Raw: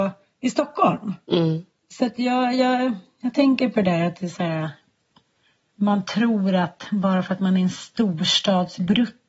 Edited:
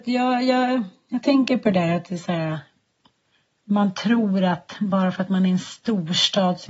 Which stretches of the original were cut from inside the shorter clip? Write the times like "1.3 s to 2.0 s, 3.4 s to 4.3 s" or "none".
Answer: none